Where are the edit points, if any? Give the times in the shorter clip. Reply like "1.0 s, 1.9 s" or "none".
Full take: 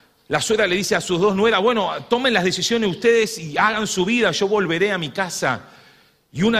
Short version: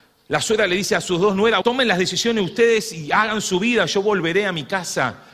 1.6 s